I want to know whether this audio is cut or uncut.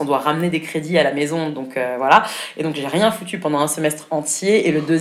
uncut